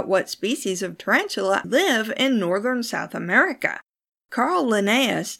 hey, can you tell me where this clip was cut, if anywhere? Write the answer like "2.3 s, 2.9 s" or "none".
1.6 s